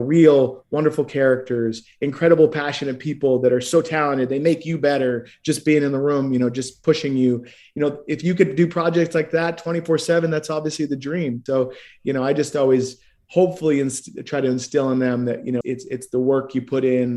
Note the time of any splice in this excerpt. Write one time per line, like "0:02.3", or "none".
0:11.5
0:15.6